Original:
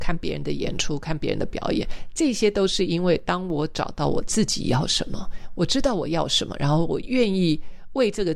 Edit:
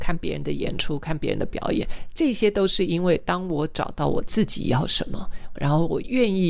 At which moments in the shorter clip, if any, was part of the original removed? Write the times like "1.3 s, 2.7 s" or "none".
5.6 s